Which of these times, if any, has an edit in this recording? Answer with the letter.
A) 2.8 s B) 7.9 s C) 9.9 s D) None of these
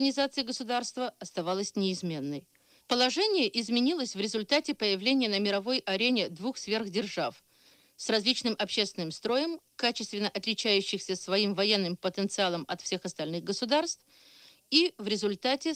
A